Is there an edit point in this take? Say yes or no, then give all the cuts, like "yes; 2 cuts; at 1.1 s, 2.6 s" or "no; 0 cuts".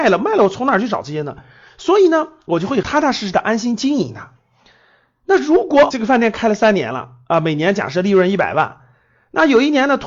no; 0 cuts